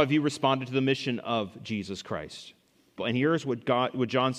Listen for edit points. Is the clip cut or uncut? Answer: cut